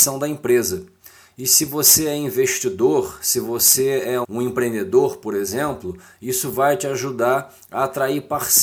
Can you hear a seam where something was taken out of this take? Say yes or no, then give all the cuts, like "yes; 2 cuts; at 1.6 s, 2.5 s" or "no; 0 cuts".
yes; 1 cut; at 4.2 s